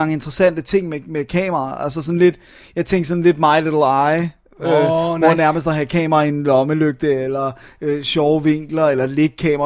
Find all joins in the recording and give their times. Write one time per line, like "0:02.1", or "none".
none